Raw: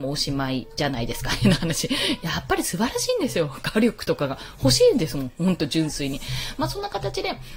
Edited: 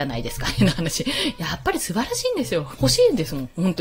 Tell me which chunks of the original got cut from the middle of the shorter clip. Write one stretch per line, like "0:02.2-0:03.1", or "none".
0:03.6-0:04.6